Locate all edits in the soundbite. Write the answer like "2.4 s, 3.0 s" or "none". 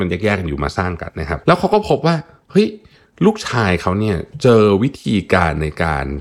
1.1 s